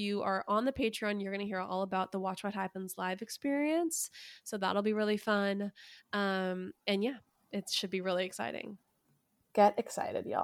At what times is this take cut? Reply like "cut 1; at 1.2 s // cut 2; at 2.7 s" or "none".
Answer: none